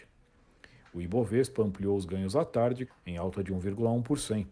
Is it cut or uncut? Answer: cut